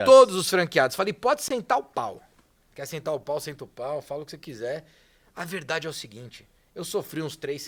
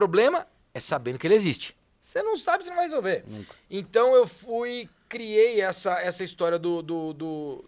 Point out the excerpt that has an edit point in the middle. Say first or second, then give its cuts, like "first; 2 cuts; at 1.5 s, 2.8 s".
first; 1 cut; at 2.6 s